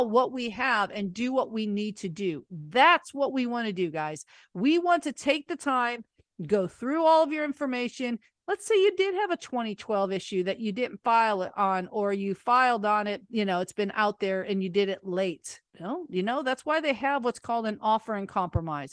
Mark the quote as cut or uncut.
cut